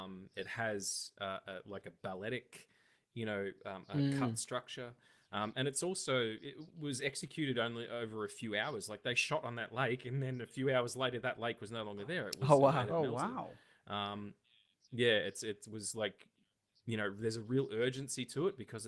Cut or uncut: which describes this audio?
uncut